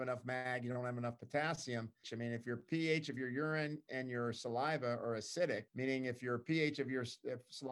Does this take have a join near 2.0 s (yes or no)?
yes